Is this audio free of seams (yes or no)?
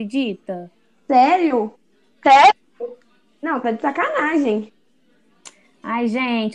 yes